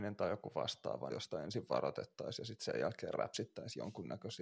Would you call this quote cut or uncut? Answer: cut